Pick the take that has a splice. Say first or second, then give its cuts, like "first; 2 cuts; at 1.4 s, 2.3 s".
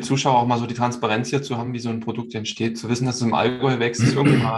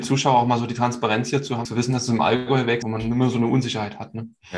second; 2 cuts; at 1.7 s, 2.8 s